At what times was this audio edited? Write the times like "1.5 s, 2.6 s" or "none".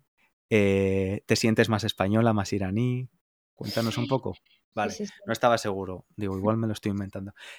4.7 s